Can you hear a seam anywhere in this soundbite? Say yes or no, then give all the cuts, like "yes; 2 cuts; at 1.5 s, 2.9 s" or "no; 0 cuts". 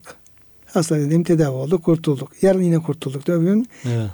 no; 0 cuts